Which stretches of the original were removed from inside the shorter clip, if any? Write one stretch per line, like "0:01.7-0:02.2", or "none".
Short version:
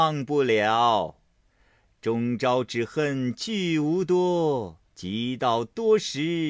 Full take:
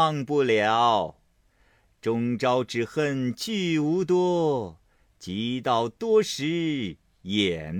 0:04.9-0:05.1

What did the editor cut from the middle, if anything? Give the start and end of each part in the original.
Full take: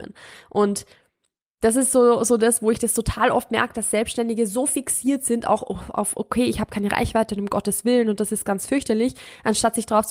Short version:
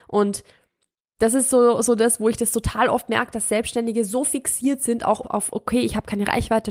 0:05.6-0:05.9

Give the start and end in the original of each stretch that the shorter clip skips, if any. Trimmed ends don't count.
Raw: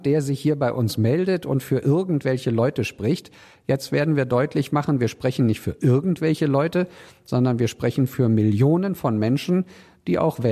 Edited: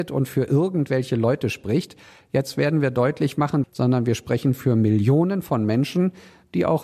0:05.0-0:07.2

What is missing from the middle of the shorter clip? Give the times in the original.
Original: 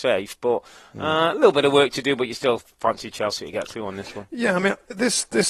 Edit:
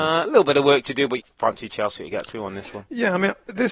0:02.3-0:02.6

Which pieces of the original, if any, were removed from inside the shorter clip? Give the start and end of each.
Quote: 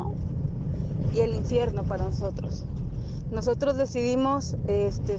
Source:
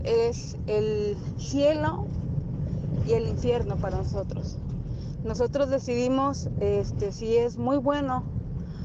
none

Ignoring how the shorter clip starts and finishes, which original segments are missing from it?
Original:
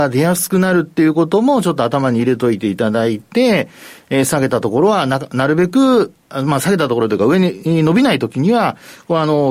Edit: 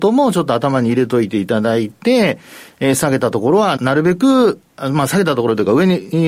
0:05.1-0:05.3

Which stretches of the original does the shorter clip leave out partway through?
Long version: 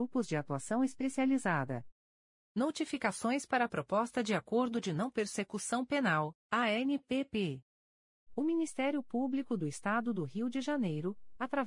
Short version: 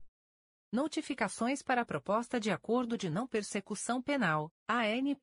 none

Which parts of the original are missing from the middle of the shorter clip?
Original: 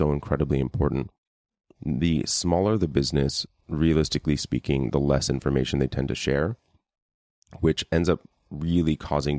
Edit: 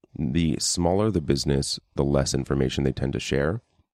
0:03.6-0:04.9

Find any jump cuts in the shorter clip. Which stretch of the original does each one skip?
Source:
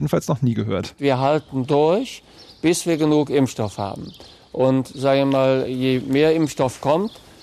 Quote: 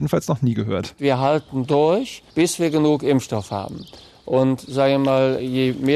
0:02.3-0:02.6

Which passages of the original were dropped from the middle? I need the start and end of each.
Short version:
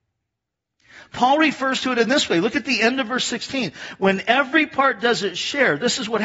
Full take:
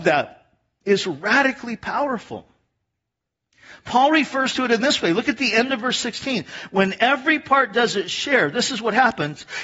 none

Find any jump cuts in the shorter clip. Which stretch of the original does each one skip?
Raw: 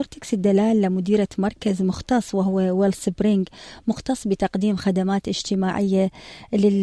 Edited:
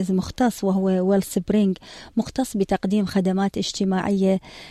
none

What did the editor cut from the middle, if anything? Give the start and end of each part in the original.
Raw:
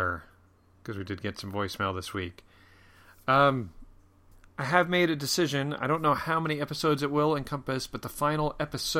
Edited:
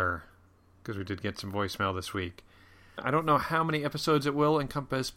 0:03.0-0:05.7

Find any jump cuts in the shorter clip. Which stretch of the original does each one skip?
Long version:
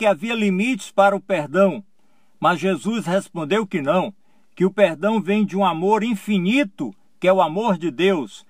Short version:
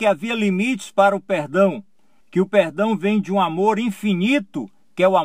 0:02.2-0:04.4

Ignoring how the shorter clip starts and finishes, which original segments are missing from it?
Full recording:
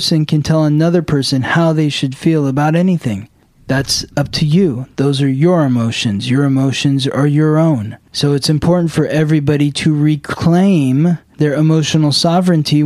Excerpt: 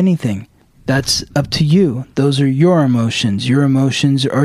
none

